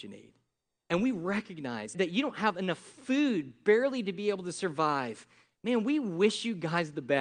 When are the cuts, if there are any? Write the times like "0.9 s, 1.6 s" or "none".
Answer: 1.9 s